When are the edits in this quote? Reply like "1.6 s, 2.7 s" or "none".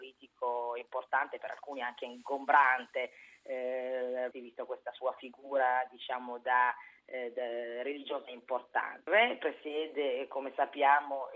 4.3 s, 9.1 s